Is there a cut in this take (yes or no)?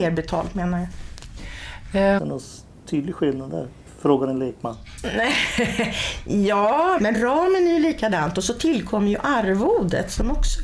yes